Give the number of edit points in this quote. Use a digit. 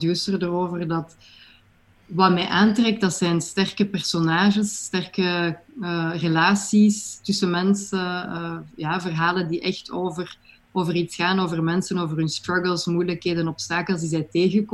0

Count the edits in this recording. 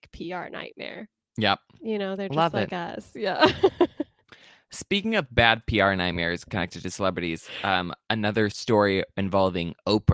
0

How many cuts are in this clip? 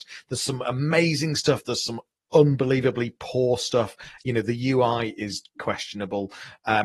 1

